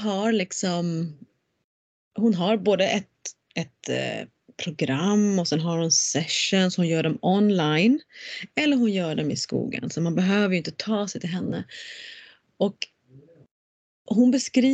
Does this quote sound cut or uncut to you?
uncut